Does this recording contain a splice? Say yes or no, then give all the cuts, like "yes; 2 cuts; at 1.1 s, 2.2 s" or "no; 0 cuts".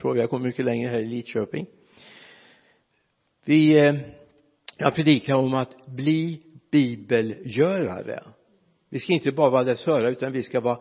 no; 0 cuts